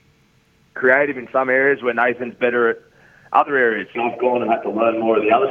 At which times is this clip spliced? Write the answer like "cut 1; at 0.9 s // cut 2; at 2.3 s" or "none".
cut 1; at 4.0 s